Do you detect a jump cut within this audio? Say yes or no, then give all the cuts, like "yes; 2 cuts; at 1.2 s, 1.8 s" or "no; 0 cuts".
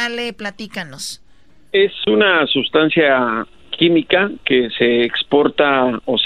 no; 0 cuts